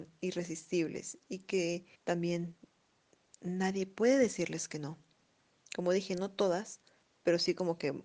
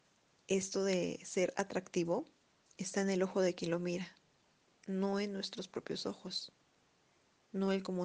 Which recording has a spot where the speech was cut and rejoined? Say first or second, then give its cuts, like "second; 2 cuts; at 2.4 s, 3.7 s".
first; 1 cut; at 1.9 s